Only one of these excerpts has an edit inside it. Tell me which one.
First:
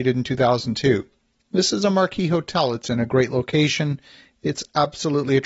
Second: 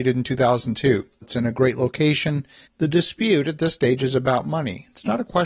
second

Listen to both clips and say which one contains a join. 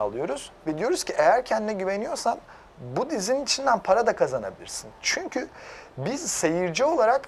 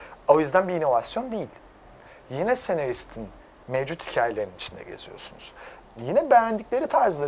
second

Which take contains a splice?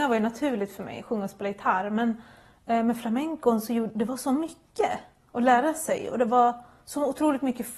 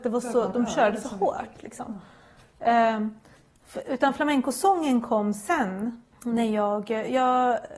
second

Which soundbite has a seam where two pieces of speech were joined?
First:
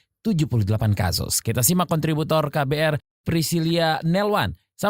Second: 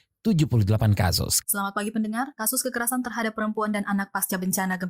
second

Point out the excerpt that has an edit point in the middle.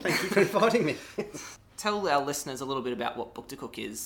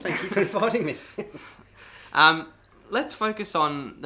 first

